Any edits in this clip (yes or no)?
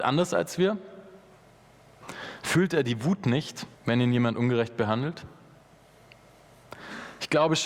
yes